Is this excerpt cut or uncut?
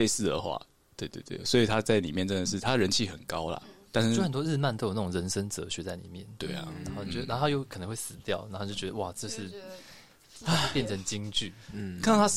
uncut